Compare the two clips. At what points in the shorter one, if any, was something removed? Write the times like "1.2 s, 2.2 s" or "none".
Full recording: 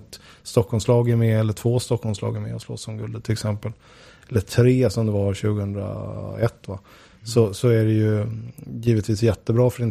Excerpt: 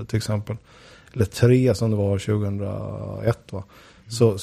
none

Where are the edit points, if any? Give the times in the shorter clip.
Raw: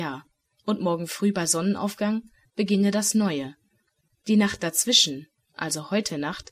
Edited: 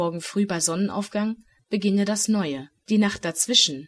2.8 s

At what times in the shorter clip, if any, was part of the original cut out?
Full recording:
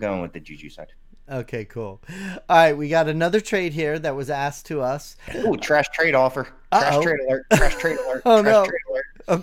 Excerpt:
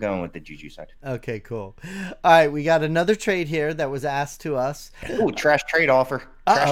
1.0 s

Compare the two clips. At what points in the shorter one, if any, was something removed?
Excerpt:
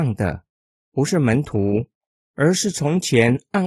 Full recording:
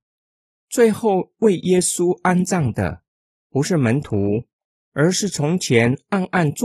none

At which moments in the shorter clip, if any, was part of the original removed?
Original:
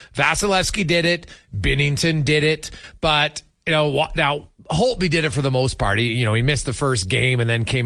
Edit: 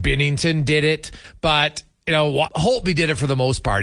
2.5 s

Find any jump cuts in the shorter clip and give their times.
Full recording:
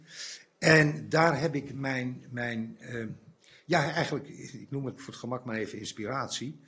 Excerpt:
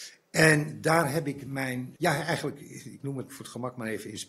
2.0 s

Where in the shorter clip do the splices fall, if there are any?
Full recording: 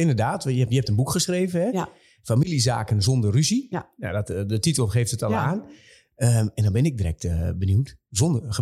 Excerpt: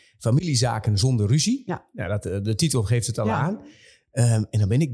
none

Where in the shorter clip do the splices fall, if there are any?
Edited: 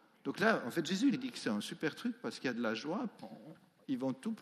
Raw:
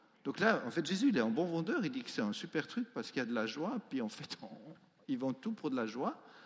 1.1 s, 3.2 s

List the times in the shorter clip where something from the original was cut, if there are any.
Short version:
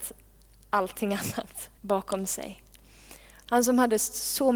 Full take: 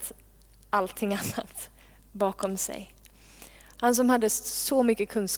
1.8 s

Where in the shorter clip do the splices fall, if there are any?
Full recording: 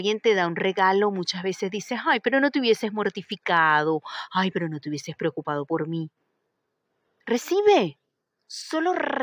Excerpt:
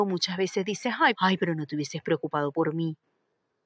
1.1 s

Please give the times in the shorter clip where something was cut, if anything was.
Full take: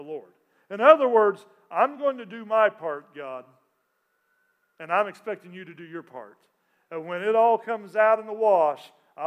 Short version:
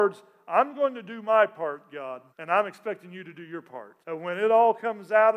2.3 s, 4.0 s

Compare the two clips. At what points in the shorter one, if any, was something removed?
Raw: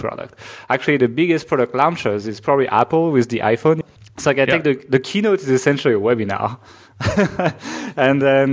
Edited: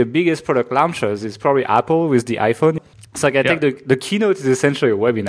none

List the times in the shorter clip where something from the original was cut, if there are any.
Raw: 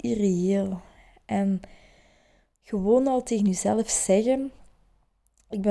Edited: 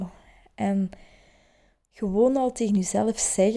none

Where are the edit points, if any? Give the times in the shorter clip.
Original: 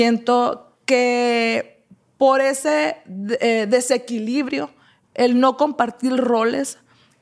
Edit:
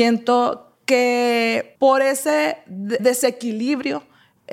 1.7 s, 3.0 s

